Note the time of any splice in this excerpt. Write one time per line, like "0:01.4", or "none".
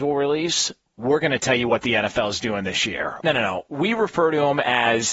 0:03.2